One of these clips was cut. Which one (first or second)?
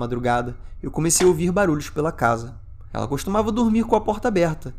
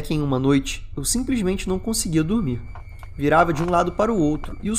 first